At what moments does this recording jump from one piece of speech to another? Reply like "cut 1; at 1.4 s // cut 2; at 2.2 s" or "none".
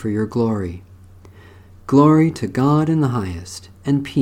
none